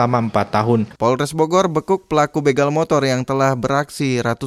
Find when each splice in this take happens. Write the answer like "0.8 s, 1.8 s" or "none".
1.0 s